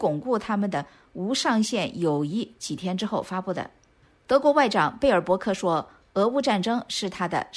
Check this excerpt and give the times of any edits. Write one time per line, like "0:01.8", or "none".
none